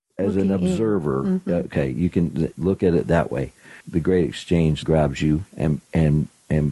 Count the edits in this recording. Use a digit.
3